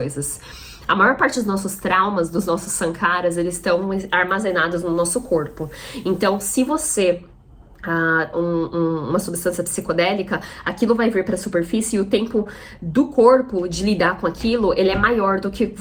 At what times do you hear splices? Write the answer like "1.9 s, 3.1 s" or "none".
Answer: 8.3 s